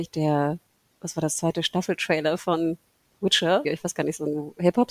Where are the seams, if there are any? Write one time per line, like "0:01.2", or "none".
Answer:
0:03.6